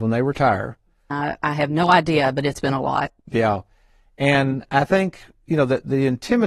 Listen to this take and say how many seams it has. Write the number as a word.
one